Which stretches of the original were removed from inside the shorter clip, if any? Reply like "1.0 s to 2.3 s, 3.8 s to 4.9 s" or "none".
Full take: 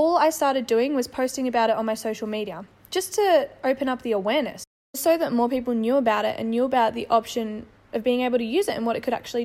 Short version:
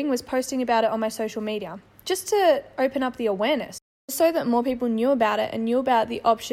none